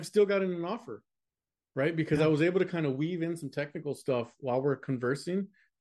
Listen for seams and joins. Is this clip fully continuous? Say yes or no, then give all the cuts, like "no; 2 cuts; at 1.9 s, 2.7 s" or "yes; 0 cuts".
yes; 0 cuts